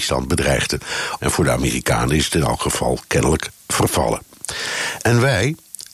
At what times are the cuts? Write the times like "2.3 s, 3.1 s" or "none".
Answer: 1.2 s

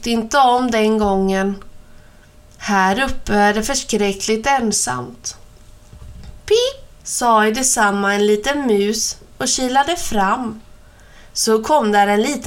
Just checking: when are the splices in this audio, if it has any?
7.0 s

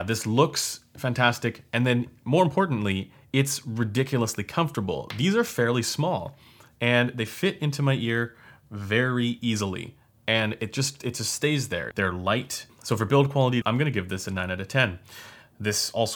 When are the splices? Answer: 11.9 s, 13.6 s

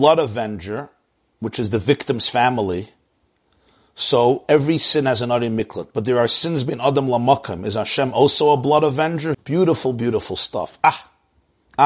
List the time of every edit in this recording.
9.3 s

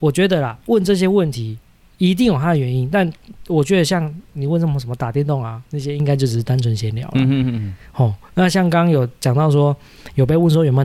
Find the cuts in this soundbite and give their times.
none

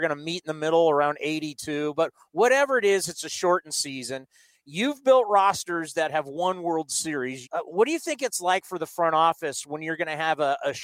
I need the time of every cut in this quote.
7.4 s

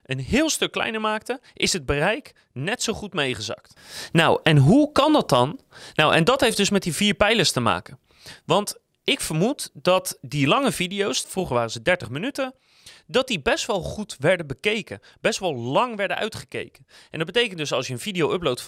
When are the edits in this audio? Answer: 11.2 s

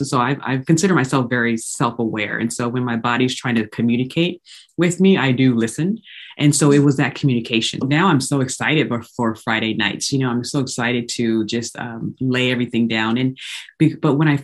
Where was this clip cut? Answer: 7.8 s

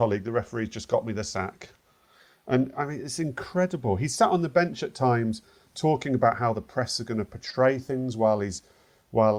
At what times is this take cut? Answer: none

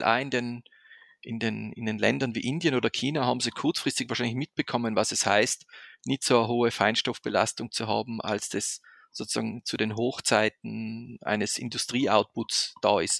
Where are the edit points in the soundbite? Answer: none

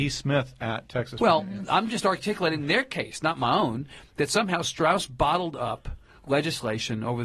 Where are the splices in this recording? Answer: none

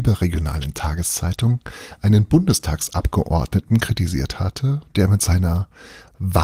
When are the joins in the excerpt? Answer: none

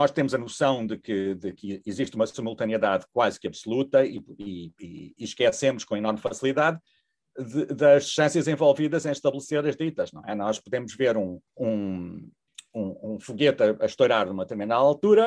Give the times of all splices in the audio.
11.5 s

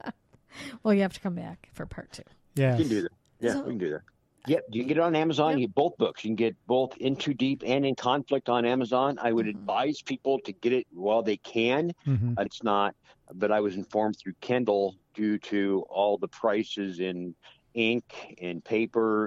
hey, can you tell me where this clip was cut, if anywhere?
4.4 s, 12.5 s

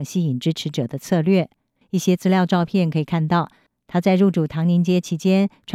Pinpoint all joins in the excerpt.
1.8 s

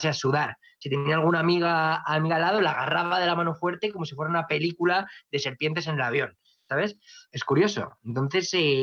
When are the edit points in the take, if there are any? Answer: 7.3 s

